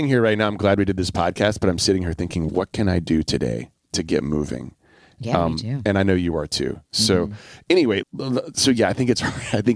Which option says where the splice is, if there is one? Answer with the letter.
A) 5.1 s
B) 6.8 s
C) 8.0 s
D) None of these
C